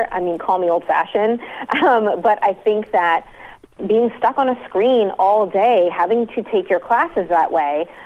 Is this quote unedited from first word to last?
yes; 0 cuts

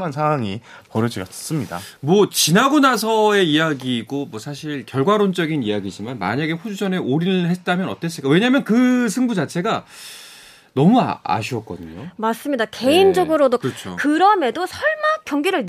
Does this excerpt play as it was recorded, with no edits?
no; 1 cut; at 13.6 s

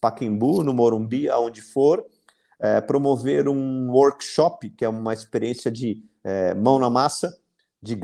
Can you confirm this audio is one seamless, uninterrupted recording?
yes; 0 cuts

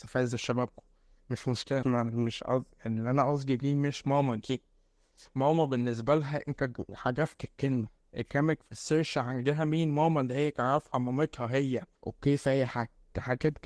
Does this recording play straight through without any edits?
no; 2 cuts; at 1.8 s, 12.0 s

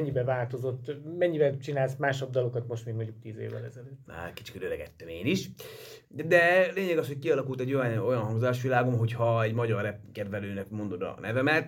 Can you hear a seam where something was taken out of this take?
yes; 2 cuts; at 4.1 s, 6.0 s

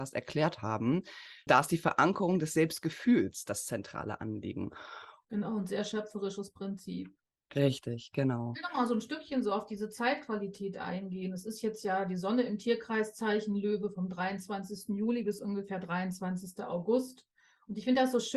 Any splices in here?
yes; 2 cuts; at 1.5 s, 5.2 s

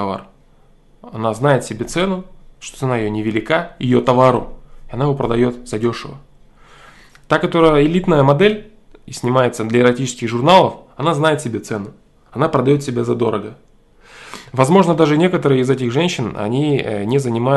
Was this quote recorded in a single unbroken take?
yes; 0 cuts

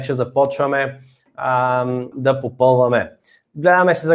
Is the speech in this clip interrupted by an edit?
yes; 1 cut; at 2.1 s

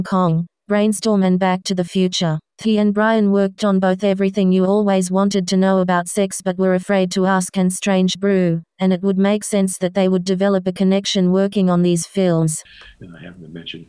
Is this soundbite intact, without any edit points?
yes; 0 cuts

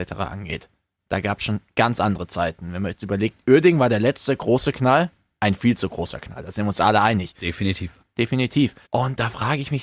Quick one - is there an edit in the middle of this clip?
yes; 1 cut; at 8.0 s

